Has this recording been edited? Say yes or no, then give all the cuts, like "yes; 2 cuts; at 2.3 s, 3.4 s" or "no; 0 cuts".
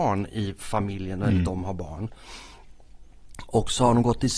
no; 0 cuts